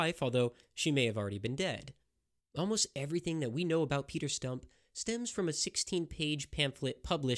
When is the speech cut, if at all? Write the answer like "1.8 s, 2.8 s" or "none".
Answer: 2.4 s